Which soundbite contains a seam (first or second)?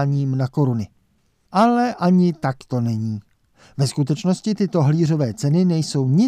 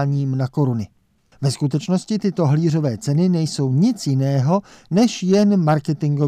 second